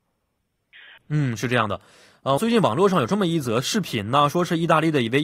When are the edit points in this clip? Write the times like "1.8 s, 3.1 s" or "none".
1.0 s, 2.4 s